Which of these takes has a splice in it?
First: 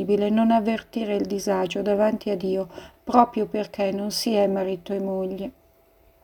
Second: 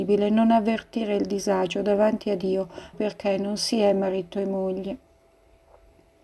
second; 1 cut; at 2.9 s

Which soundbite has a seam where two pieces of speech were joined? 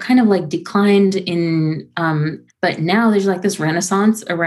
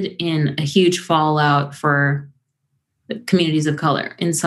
first; 1 cut; at 2.5 s

